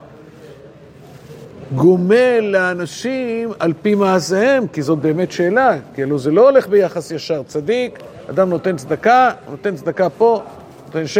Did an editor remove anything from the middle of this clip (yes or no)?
no